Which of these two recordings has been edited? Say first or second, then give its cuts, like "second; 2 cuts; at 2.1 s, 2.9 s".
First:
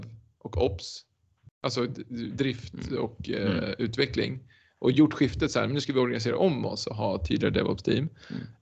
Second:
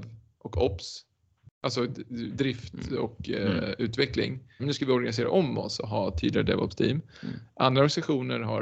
second; 1 cut; at 4.6 s